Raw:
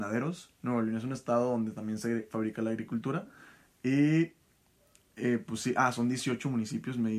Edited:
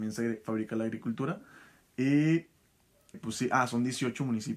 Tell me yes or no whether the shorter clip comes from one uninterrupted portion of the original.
no